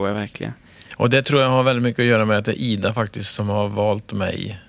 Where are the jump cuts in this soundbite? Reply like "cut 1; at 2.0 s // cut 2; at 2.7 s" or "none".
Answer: none

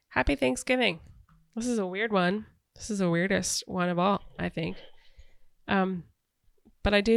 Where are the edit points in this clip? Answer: none

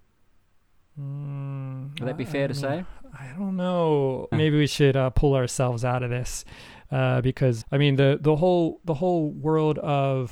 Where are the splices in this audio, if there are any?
cut 1; at 4.3 s // cut 2; at 7.6 s

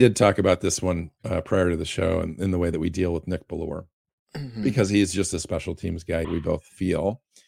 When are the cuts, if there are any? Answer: cut 1; at 6.2 s

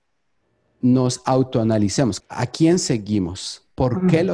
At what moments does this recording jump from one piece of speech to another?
cut 1; at 2.2 s

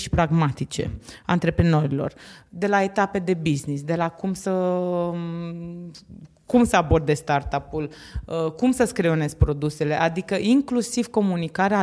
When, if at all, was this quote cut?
none

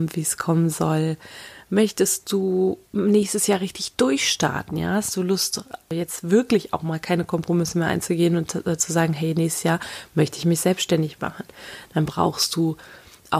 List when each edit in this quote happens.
cut 1; at 2.9 s

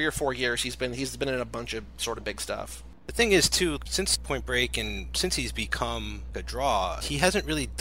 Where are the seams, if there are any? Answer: none

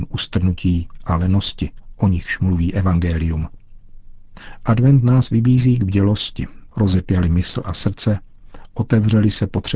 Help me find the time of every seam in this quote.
cut 1; at 6.7 s

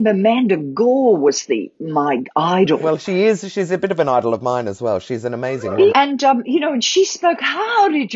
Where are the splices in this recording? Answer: cut 1; at 5.9 s

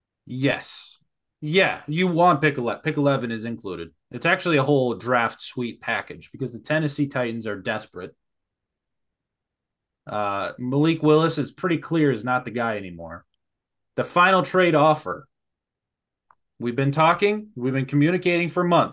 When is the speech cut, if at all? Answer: none

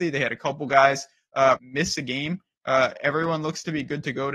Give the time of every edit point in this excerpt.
cut 1; at 1.6 s

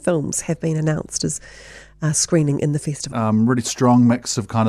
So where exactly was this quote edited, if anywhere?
cut 1; at 3.1 s

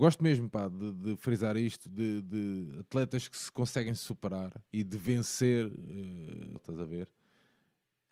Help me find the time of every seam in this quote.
cut 1; at 4.7 s // cut 2; at 6.6 s

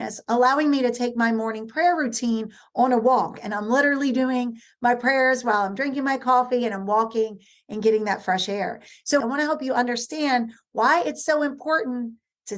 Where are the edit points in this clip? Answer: cut 1; at 9.2 s

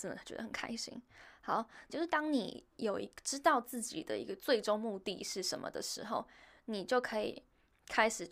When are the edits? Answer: cut 1; at 1.9 s

